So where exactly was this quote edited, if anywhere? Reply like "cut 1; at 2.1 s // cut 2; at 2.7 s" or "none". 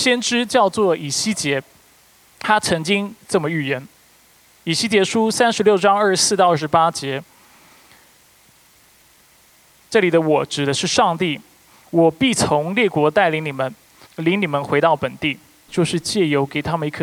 cut 1; at 14.1 s // cut 2; at 15.7 s